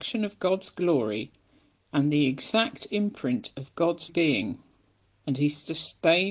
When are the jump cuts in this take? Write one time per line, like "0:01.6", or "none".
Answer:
0:04.1